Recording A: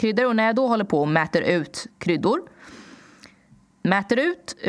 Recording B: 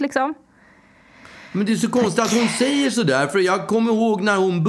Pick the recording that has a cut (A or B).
A